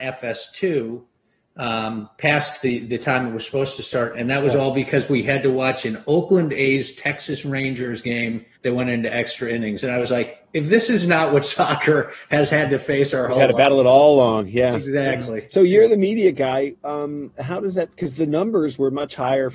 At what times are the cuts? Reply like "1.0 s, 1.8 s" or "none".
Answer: 4.1 s, 8.5 s